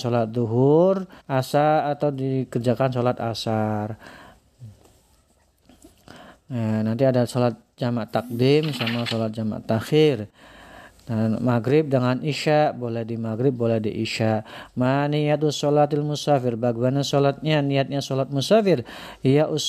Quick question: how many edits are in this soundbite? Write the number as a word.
one